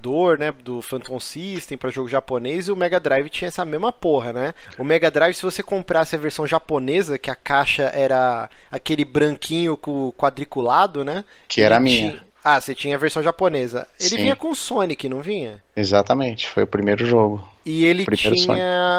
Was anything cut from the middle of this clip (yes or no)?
no